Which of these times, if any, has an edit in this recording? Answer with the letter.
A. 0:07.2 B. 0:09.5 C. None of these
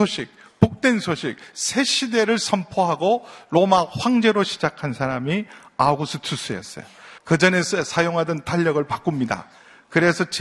A